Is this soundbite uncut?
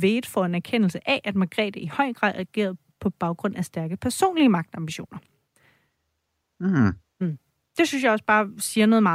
yes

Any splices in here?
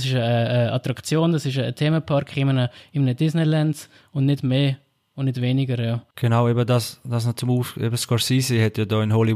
no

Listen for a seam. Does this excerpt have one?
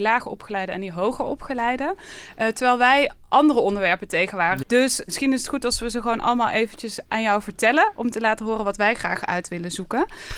yes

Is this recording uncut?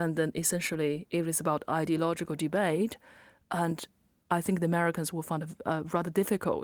yes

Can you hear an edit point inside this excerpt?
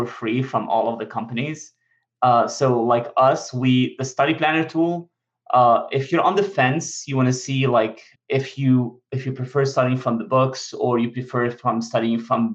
yes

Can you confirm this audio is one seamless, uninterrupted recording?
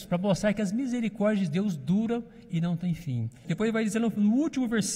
no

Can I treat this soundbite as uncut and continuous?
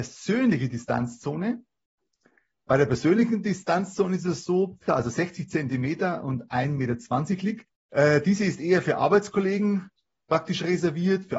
no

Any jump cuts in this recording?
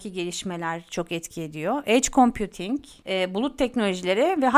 no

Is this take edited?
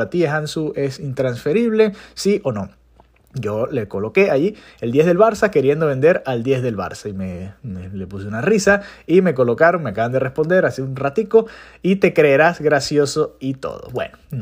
no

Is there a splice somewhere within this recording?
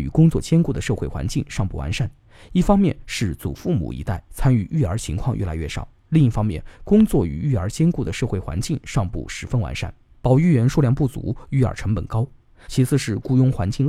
yes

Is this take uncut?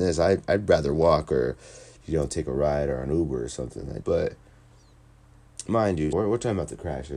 no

